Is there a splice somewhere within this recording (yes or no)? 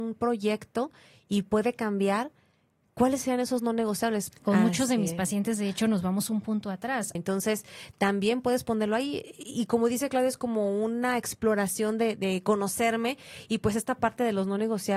yes